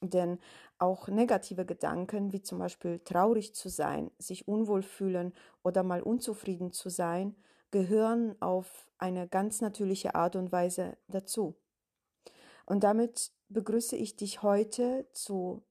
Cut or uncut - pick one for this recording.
uncut